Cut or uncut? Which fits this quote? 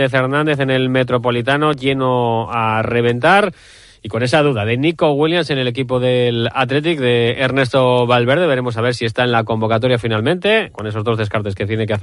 uncut